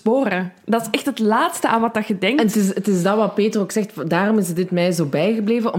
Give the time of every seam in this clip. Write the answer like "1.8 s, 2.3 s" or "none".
none